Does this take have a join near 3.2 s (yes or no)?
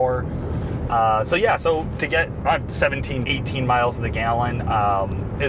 yes